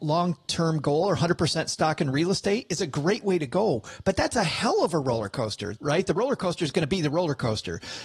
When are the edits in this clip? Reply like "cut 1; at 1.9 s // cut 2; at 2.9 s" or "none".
cut 1; at 5.8 s